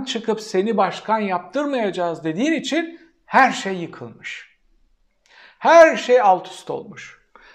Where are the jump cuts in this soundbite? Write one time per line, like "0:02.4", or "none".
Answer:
none